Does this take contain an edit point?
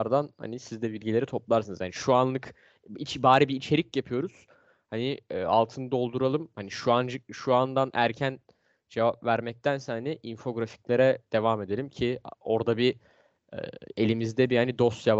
no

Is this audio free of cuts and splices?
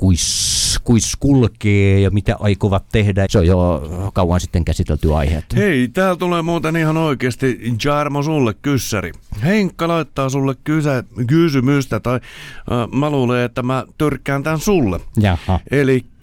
no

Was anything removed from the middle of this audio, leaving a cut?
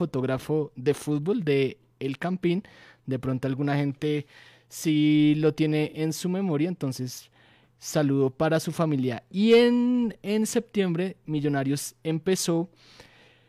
no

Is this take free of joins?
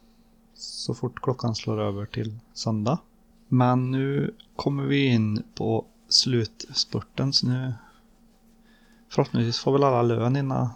no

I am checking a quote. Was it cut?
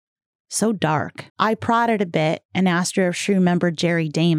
yes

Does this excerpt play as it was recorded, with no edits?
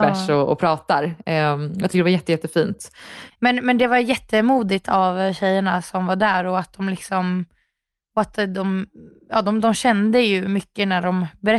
no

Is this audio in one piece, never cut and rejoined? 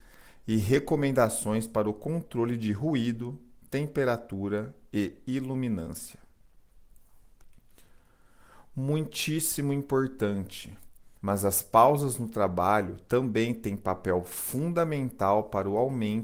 no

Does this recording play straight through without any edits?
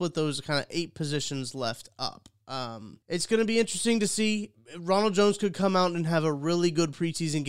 no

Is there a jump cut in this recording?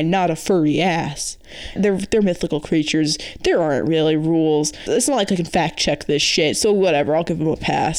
yes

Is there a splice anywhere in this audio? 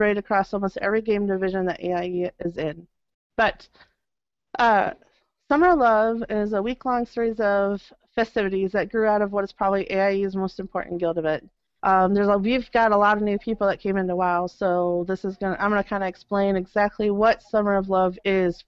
yes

